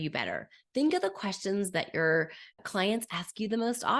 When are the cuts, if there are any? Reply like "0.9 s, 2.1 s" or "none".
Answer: 2.5 s